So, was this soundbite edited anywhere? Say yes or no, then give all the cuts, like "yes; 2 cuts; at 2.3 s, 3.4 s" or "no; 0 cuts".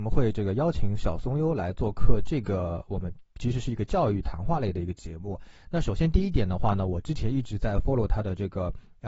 no; 0 cuts